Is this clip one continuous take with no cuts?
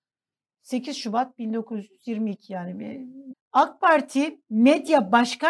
no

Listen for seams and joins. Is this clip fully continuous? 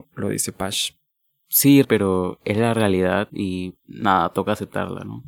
no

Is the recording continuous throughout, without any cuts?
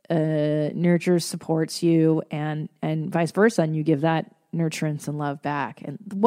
yes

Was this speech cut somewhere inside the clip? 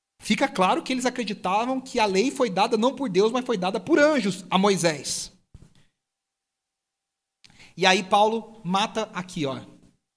no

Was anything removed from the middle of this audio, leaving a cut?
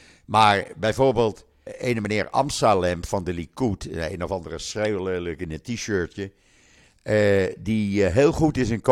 yes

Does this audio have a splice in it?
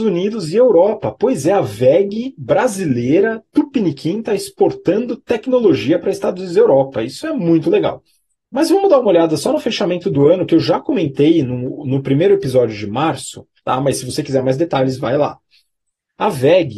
yes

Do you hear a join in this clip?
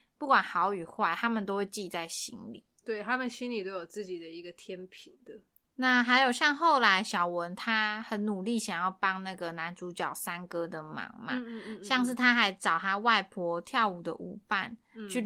yes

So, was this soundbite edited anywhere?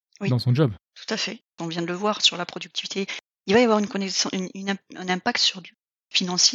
yes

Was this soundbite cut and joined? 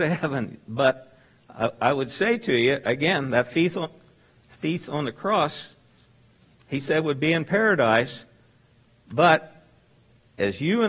no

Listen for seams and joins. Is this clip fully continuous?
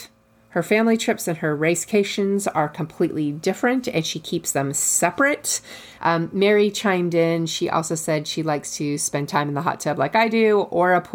no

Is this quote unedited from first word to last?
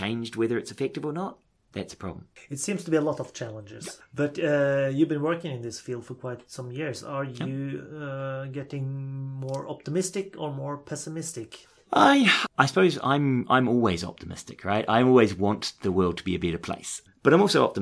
no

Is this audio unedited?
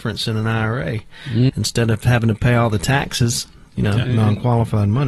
no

